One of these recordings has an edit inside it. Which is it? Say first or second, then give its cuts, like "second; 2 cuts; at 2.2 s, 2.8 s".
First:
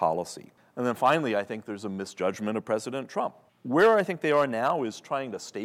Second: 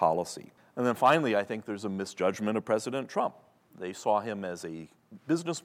first; 1 cut; at 3.5 s